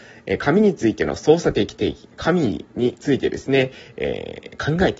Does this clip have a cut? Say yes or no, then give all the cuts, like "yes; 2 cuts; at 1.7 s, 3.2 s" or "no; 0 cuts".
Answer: no; 0 cuts